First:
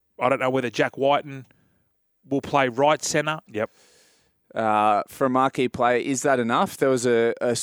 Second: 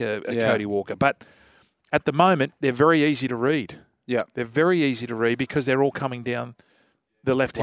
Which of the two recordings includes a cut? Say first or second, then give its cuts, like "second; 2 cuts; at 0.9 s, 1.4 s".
first; 1 cut; at 3.5 s